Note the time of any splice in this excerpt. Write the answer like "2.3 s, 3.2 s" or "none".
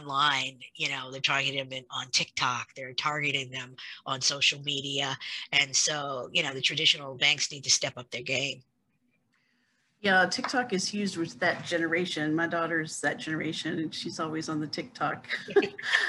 none